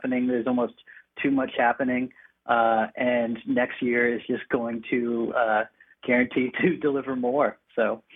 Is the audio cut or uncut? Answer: uncut